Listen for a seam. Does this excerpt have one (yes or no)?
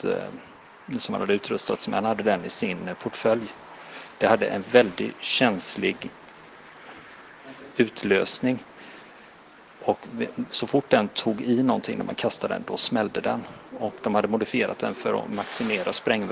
no